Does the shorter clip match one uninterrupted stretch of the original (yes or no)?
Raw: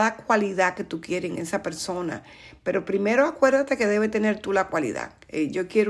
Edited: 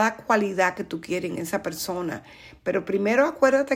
yes